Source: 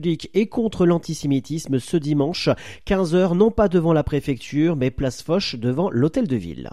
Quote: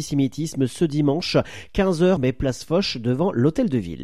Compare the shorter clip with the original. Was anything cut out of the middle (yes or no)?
yes